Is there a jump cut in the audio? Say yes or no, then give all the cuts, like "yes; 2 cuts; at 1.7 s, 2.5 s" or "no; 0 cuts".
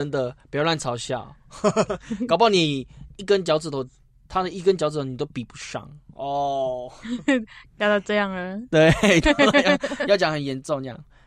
no; 0 cuts